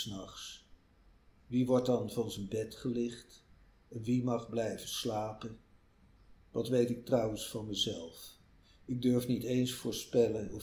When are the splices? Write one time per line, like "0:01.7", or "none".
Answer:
0:06.4